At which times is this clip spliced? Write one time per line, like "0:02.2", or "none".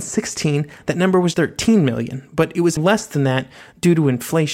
0:01.3
0:02.8